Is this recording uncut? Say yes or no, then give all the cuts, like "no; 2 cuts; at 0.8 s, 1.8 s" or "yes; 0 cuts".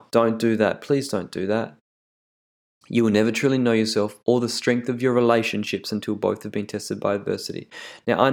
no; 1 cut; at 2.8 s